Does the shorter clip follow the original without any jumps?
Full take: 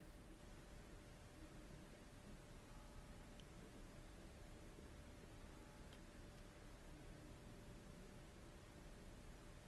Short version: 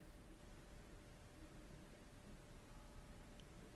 yes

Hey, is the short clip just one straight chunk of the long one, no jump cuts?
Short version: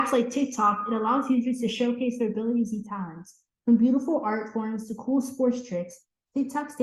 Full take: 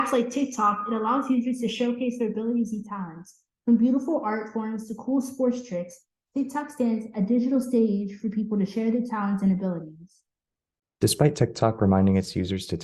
yes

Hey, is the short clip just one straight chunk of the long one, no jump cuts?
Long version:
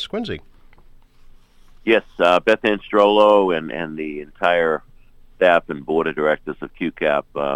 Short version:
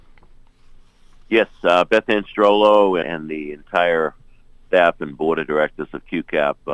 no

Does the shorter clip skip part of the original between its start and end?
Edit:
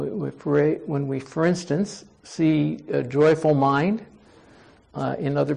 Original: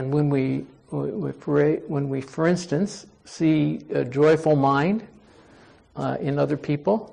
no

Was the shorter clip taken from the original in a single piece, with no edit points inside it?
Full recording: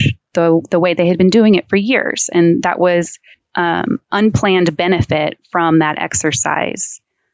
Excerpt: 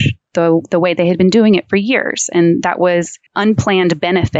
no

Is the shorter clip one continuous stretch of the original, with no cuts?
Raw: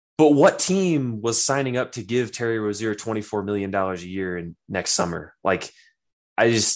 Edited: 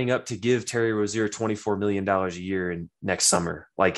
yes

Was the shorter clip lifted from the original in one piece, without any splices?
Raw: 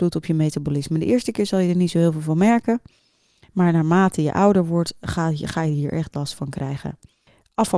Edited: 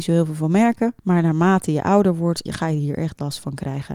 no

